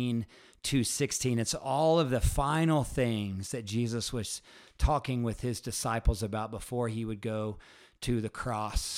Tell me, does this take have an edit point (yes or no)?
no